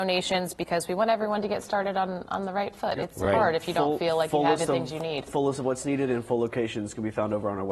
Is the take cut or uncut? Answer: uncut